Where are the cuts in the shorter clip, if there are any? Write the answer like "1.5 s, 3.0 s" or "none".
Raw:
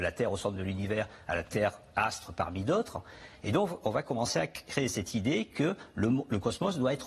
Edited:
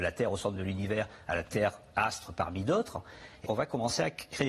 3.4 s